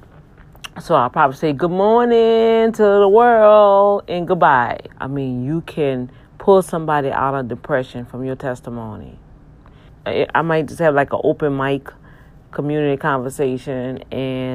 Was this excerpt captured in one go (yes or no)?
no